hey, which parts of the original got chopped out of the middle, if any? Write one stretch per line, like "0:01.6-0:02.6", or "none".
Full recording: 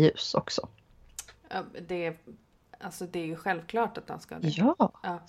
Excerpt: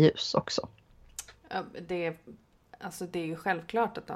none